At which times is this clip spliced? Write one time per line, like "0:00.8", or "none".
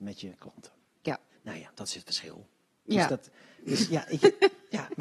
none